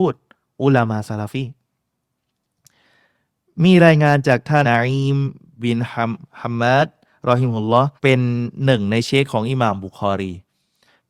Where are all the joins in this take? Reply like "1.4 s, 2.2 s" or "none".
4.6 s, 8.0 s